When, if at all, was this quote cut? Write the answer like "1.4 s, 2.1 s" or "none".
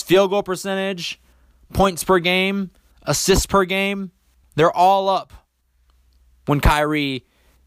4.4 s